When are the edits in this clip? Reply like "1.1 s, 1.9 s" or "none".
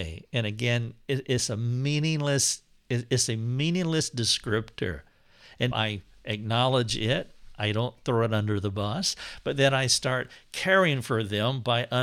5.7 s